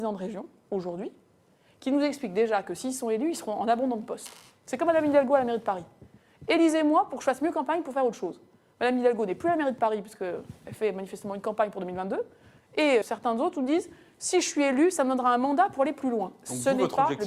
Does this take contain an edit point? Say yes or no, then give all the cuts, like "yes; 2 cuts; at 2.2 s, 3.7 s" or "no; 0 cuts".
yes; 1 cut; at 13.0 s